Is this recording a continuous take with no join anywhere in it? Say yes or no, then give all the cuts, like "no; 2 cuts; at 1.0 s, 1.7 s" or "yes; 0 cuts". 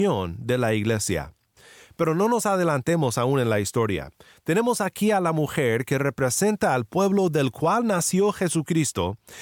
yes; 0 cuts